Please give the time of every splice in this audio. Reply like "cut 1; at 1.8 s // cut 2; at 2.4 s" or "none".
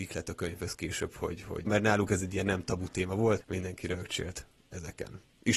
cut 1; at 1.7 s // cut 2; at 3.4 s